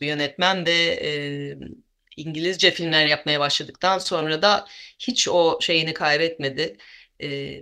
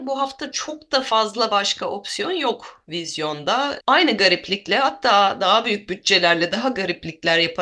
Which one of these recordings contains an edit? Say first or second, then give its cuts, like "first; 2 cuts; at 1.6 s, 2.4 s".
second; 1 cut; at 3.8 s